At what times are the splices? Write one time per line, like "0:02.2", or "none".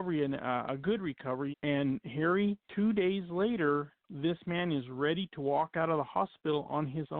0:01.5
0:02.6